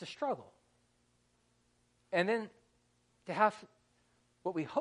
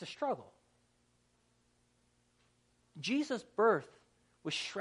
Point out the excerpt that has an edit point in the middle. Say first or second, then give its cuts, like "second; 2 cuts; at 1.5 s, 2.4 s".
first; 1 cut; at 2.0 s